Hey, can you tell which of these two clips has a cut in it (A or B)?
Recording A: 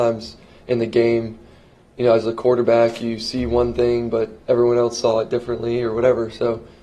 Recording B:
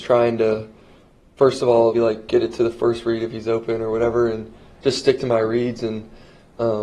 B